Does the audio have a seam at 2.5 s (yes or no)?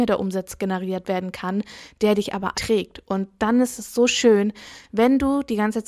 yes